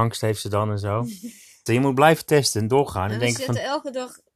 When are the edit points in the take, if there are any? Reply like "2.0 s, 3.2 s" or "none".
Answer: 1.7 s